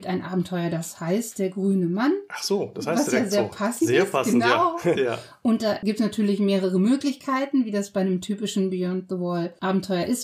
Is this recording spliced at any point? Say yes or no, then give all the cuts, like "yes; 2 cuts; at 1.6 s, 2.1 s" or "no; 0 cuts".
yes; 1 cut; at 5.0 s